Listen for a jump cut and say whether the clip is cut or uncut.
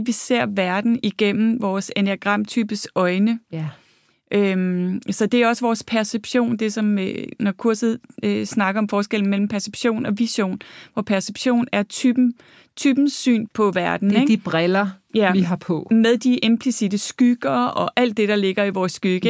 cut